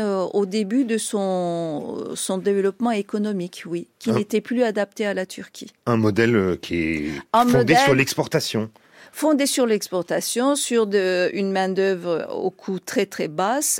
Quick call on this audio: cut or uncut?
uncut